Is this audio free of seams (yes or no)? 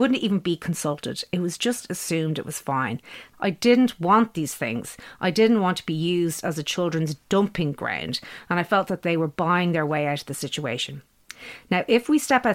no